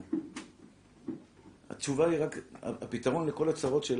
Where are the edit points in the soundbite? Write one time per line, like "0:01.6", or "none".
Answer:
0:01.6